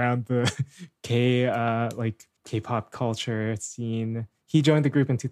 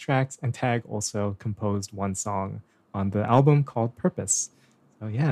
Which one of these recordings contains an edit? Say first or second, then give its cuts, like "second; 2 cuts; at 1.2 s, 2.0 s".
first; 1 cut; at 2.4 s